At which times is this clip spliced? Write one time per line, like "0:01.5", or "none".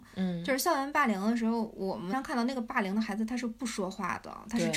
0:02.1